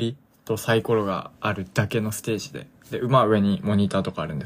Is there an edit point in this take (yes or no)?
no